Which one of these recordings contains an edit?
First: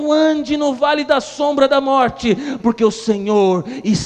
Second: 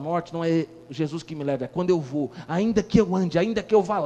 first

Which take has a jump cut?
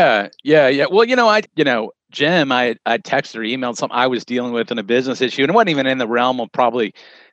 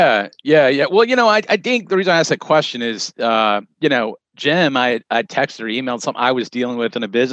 first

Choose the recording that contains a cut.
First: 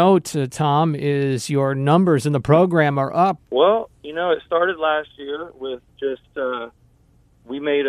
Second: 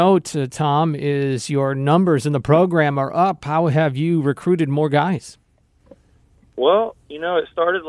first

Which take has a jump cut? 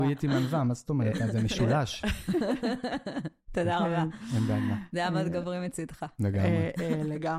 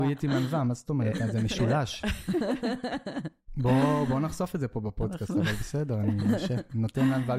first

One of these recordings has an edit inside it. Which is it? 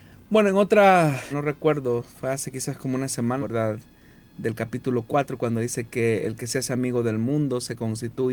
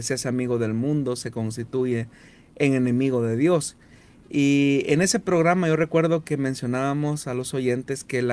first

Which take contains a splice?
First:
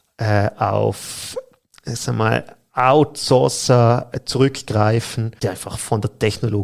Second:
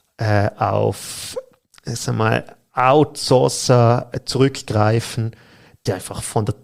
first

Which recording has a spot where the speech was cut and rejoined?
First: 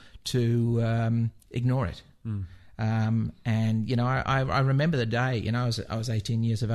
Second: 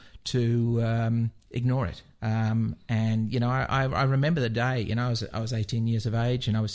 second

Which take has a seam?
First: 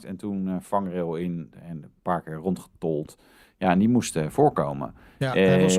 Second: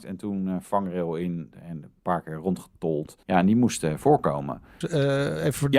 second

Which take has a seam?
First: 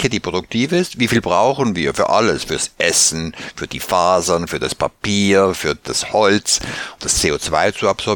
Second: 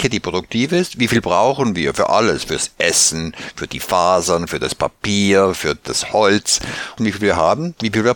second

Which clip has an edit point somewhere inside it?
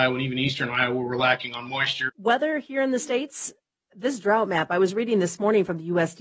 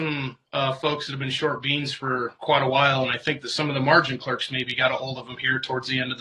first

